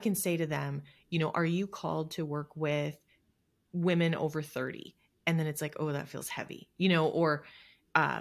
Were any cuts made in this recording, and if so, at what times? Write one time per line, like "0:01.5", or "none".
none